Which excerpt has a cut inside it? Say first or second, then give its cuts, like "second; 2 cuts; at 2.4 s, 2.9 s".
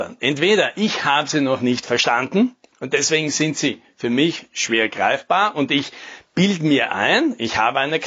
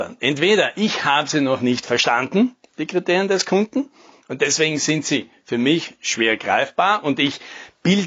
first; 1 cut; at 2.7 s